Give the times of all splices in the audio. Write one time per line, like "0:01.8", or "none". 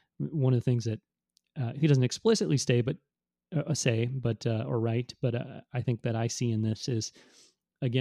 none